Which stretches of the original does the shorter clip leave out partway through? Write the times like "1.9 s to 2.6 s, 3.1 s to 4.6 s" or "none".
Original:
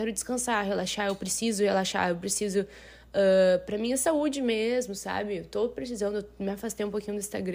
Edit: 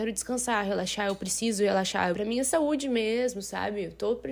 2.1 s to 3.7 s